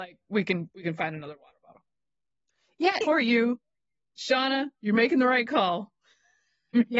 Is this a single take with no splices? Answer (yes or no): no